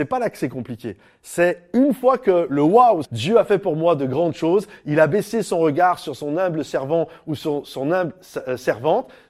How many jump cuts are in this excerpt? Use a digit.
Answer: 1